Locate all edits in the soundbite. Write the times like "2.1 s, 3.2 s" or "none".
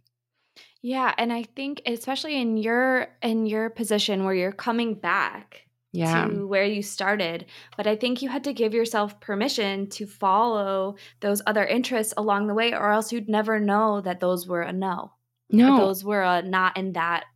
none